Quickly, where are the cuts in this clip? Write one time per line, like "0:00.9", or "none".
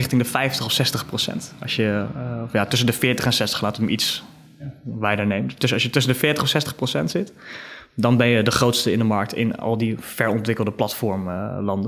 none